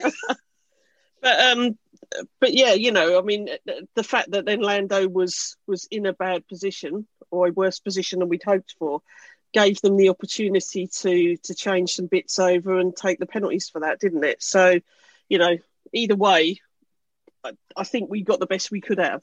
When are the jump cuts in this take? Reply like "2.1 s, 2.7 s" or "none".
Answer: none